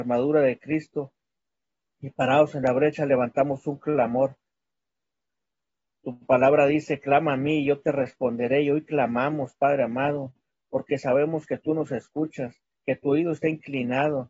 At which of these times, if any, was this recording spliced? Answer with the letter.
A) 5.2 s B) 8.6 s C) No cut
C